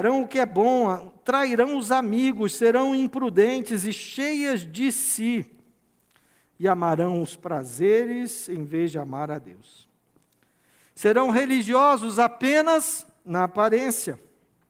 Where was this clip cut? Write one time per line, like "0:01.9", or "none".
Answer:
none